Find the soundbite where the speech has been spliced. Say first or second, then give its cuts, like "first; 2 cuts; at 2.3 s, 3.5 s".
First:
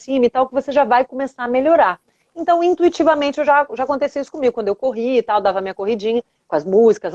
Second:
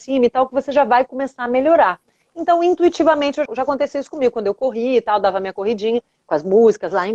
second; 1 cut; at 3.5 s